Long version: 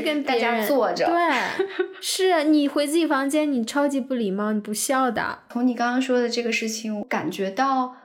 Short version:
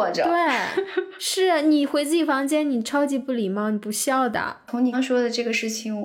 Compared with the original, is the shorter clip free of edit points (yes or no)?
no